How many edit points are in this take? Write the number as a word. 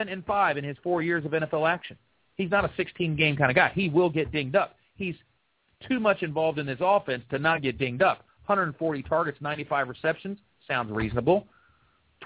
zero